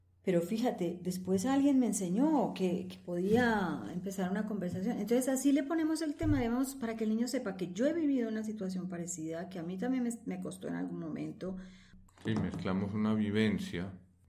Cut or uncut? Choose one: uncut